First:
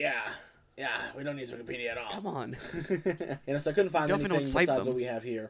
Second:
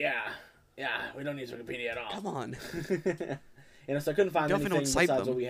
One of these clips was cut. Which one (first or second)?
first